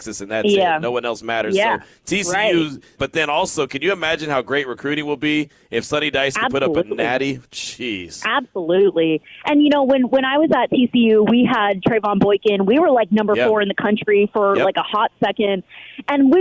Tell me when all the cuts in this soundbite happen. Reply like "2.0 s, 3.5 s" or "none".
3.0 s

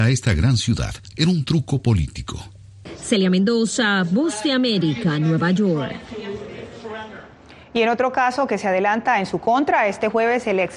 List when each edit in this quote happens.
1.1 s

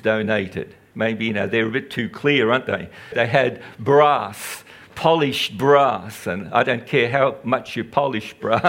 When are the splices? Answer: 0.9 s, 3.1 s

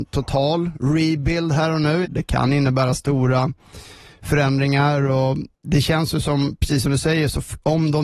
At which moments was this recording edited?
2.0 s, 5.5 s

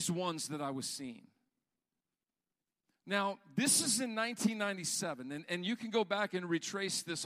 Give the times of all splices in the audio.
none

